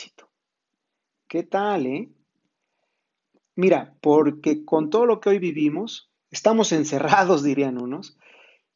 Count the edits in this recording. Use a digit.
2